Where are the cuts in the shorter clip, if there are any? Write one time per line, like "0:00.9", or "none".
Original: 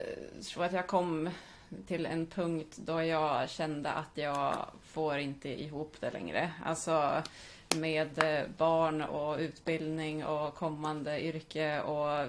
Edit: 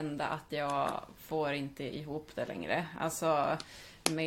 none